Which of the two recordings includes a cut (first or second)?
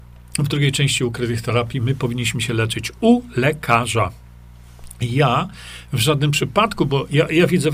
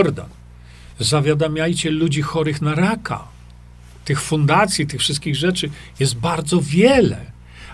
second